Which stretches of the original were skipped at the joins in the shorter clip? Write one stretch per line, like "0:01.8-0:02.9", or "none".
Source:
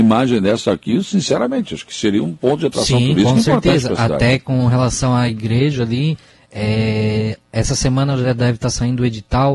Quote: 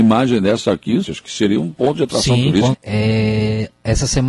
0:01.0-0:01.7
0:03.3-0:06.4